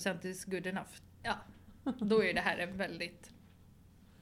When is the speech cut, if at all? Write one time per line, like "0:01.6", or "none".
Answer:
0:01.0

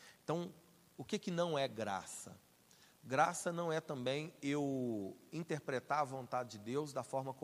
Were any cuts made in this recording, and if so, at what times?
none

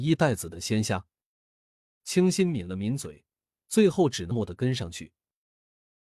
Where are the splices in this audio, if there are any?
0:02.0
0:04.3

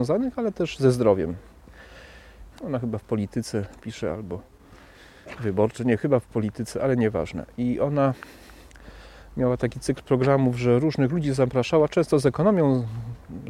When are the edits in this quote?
0:02.5

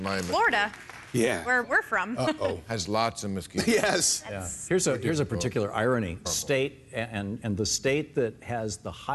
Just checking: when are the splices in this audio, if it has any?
0:01.6
0:06.2
0:07.4

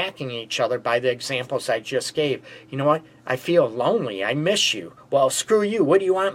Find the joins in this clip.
none

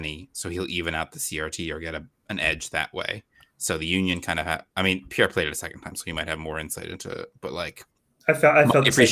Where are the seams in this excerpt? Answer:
none

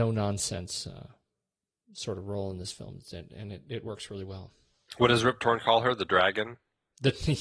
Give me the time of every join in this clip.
none

